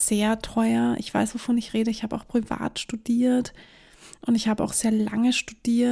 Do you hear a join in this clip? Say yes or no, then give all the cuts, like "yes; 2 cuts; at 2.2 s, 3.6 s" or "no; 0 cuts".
no; 0 cuts